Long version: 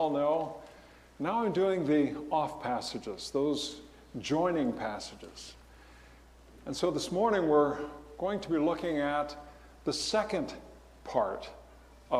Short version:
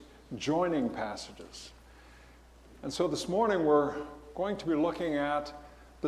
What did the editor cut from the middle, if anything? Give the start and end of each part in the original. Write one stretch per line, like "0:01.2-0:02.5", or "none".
none